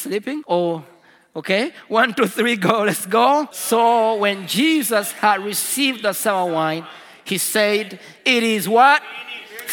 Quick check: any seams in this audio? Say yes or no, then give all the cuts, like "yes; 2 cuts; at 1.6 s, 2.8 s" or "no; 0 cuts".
no; 0 cuts